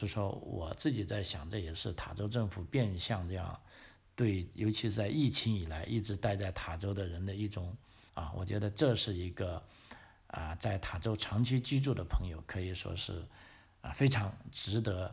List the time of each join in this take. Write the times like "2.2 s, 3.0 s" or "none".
8.1 s